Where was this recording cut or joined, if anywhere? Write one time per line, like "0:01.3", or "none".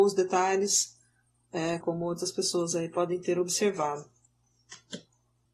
0:01.8